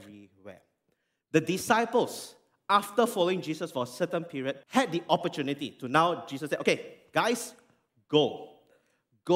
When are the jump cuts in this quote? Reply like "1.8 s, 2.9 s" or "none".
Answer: 4.6 s